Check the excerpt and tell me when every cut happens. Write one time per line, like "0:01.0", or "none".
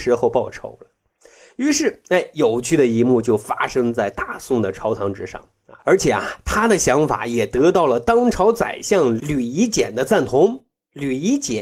0:05.8